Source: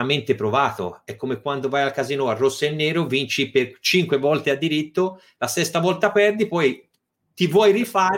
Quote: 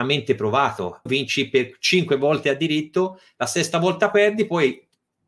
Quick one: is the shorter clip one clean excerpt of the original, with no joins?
no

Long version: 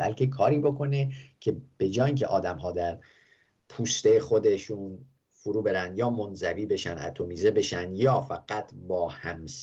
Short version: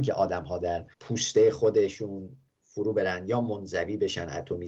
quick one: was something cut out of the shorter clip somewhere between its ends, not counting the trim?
yes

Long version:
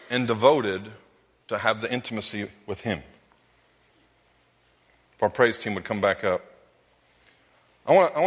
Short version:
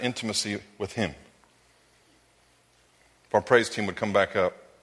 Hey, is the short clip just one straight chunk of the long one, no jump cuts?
yes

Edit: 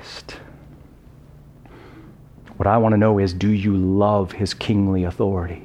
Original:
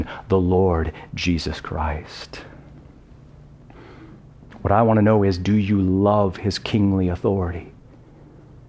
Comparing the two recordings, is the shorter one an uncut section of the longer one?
yes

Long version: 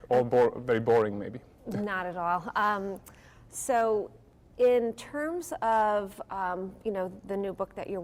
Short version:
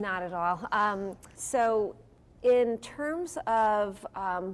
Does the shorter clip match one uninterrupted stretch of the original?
no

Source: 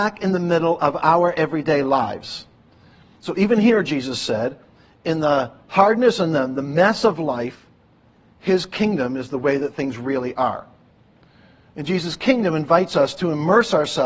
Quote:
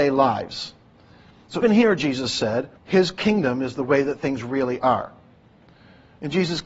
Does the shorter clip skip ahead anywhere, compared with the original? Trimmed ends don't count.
yes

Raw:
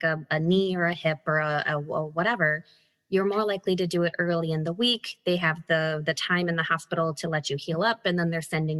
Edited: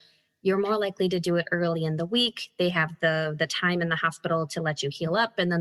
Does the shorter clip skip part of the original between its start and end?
no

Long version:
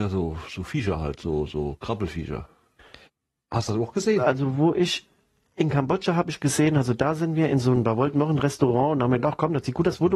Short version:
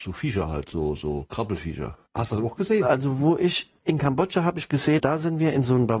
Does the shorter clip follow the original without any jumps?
no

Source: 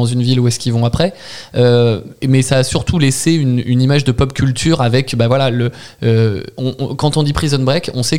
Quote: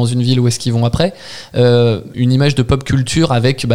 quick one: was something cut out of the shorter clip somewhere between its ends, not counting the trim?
yes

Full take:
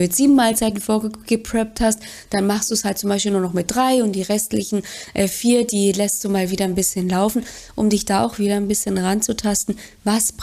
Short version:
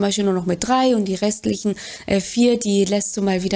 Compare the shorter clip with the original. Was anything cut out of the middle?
no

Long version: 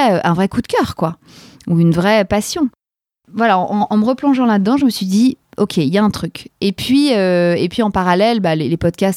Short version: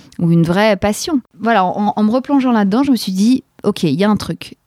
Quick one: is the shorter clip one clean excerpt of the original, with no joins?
no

